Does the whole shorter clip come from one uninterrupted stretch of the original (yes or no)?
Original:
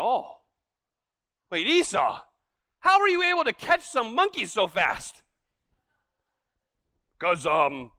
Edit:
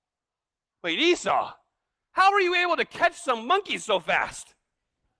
yes